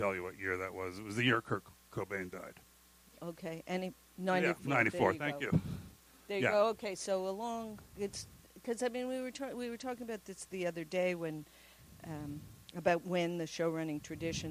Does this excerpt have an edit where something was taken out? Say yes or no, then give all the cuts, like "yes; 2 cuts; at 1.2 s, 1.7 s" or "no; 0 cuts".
no; 0 cuts